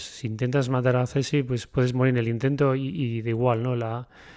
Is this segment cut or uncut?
cut